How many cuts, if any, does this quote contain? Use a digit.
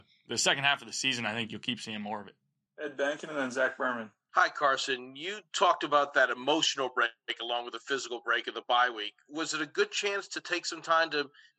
0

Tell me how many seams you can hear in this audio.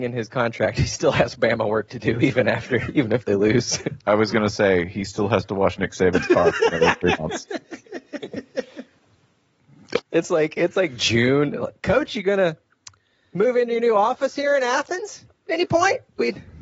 1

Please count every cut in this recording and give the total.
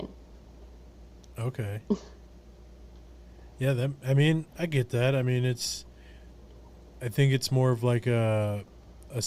0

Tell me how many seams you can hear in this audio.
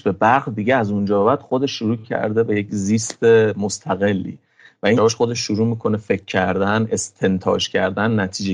1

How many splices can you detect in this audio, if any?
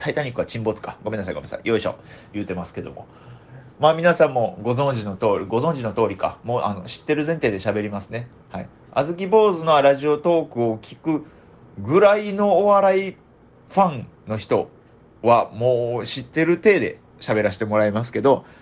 0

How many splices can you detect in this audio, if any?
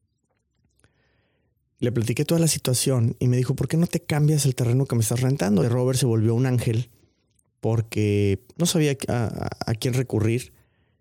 1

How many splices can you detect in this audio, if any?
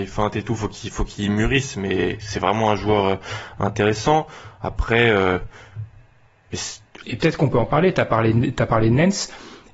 1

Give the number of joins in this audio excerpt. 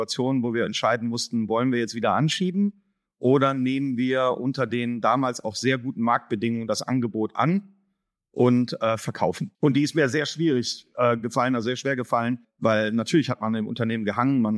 2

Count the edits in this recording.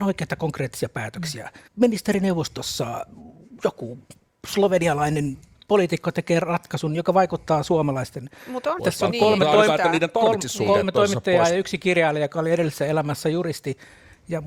2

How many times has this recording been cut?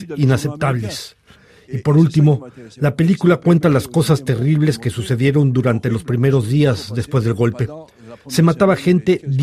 0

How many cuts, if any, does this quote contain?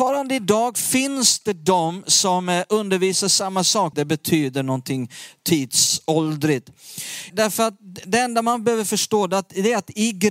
2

